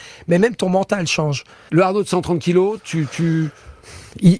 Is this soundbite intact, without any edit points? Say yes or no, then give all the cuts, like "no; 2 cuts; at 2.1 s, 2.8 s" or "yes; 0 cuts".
no; 1 cut; at 1.7 s